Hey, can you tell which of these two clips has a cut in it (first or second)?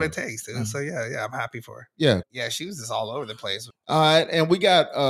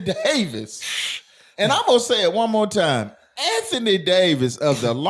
first